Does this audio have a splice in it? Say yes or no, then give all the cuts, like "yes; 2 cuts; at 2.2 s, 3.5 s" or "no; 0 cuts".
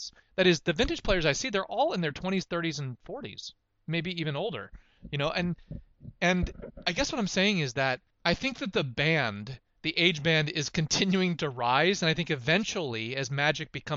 no; 0 cuts